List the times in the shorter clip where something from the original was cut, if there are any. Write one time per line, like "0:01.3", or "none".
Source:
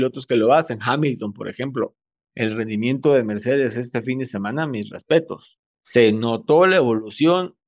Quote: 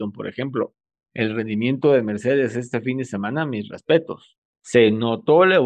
none